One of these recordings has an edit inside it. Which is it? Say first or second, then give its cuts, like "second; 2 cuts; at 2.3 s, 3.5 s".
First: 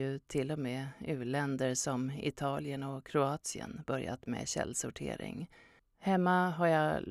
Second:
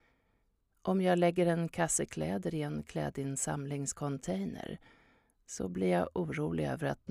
first; 1 cut; at 5.8 s